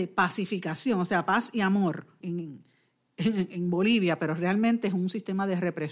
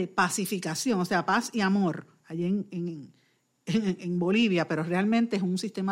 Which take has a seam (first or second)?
first